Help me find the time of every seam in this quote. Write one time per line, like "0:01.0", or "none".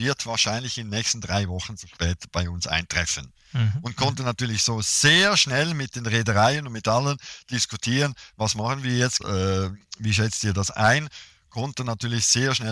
0:09.2